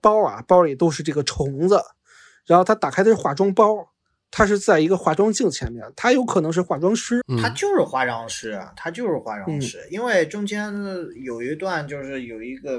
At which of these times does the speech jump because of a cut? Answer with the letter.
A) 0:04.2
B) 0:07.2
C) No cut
B